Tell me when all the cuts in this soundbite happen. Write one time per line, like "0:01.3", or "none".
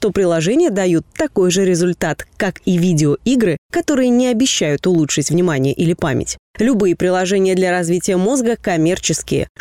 none